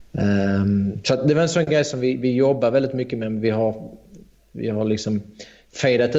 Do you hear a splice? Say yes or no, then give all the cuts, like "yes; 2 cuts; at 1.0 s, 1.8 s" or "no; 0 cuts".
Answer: no; 0 cuts